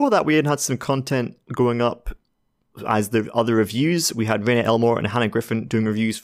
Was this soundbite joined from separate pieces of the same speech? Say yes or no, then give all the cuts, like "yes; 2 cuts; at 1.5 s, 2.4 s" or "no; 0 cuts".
no; 0 cuts